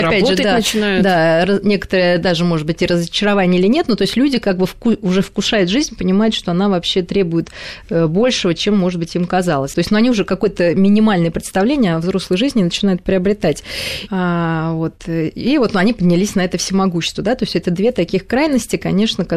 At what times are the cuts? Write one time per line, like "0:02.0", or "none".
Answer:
0:09.7
0:14.1